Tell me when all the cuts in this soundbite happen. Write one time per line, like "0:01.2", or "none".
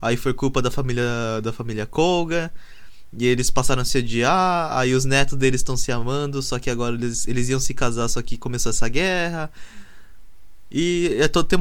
none